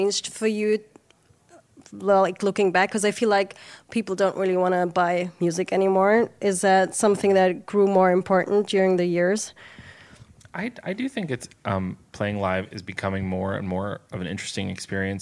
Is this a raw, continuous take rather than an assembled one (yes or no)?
yes